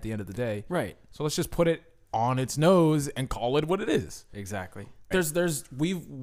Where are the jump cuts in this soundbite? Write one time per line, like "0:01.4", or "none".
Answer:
0:05.1